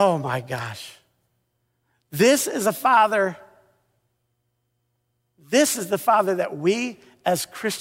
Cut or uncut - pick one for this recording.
uncut